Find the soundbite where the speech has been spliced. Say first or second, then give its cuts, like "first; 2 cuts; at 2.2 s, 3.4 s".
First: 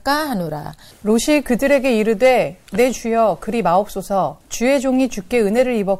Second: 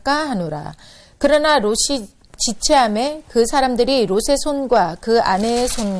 first; 2 cuts; at 0.9 s, 4.4 s